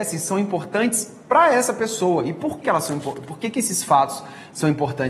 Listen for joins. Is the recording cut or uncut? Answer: cut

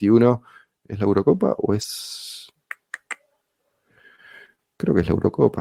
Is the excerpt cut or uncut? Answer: uncut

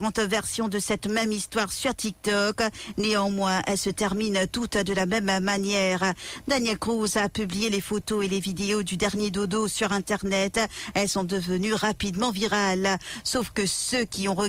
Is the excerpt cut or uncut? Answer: uncut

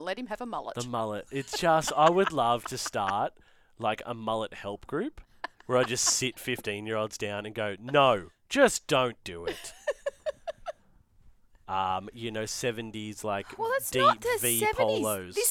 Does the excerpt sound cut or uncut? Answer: cut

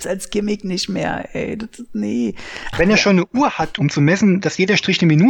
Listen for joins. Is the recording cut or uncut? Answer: cut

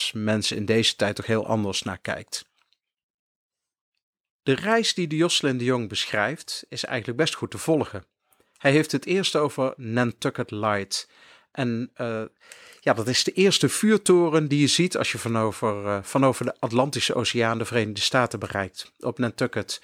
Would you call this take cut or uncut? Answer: uncut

